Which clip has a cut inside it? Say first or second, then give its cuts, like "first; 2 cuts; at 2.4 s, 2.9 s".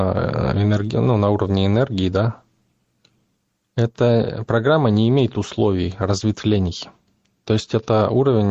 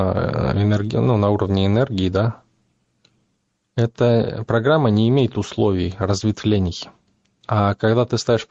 second; 1 cut; at 7.4 s